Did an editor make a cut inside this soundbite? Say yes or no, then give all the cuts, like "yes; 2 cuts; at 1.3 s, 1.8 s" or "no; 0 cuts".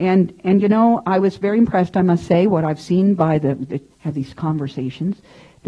yes; 1 cut; at 3.9 s